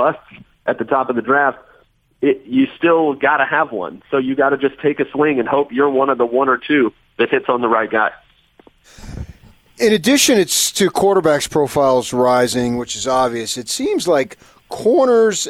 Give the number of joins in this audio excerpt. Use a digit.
0